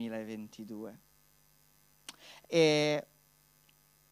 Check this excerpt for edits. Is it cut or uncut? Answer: cut